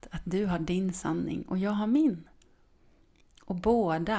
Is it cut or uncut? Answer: uncut